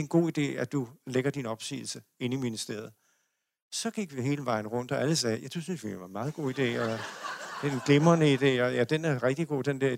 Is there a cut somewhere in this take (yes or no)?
no